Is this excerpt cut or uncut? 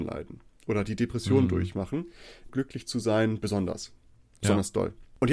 cut